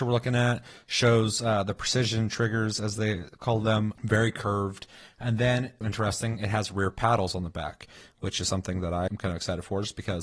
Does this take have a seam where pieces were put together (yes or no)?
yes